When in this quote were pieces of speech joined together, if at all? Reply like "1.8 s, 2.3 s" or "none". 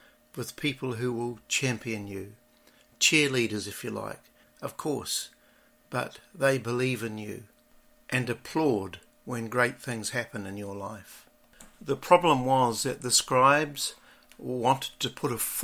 4.4 s